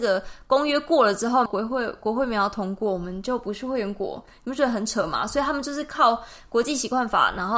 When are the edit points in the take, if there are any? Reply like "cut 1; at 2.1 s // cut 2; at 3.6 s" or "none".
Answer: cut 1; at 1.5 s